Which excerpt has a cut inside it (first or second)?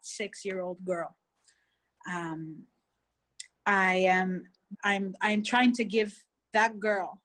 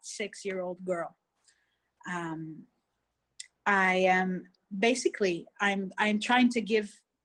first